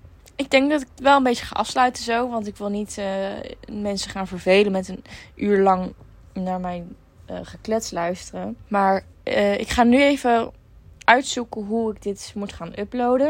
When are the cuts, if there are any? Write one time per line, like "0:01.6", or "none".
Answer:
0:08.6